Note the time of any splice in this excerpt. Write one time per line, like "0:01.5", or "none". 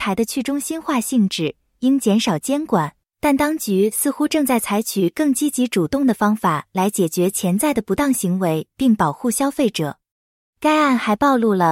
none